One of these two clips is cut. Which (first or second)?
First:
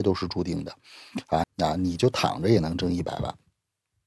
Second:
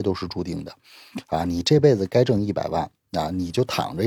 first